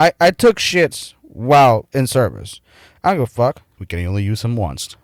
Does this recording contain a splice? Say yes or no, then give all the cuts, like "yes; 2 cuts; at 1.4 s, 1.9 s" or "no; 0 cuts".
yes; 1 cut; at 3.8 s